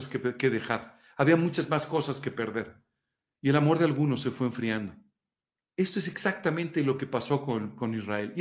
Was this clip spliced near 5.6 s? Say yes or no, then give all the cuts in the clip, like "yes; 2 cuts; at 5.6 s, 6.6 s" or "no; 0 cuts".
yes; 1 cut; at 5.6 s